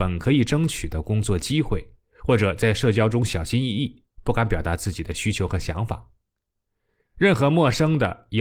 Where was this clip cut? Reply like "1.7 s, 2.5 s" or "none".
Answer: none

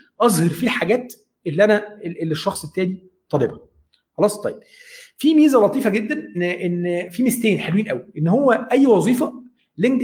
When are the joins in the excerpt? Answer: 6.3 s

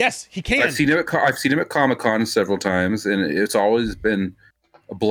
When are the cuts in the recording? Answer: none

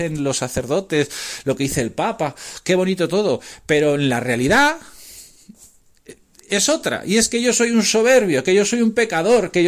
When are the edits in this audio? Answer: none

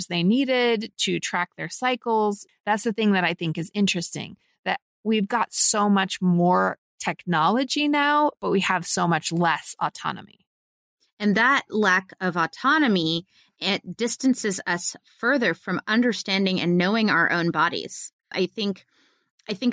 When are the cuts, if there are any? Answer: 2.5 s, 18.3 s

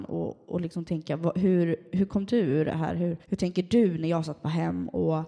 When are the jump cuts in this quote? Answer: 3.2 s

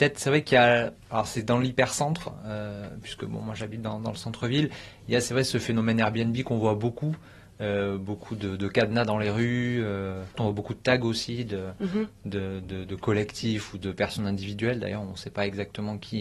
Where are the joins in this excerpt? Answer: 1.0 s

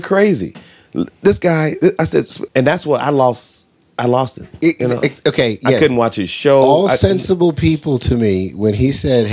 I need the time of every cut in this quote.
2.5 s

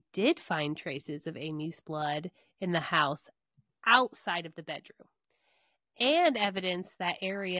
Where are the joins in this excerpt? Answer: none

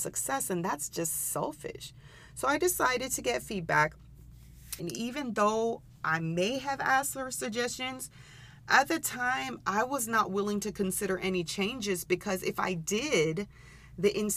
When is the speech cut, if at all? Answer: 2.3 s, 4.8 s

